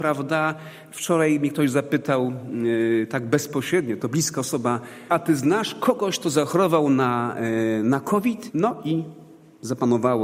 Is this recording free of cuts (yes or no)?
no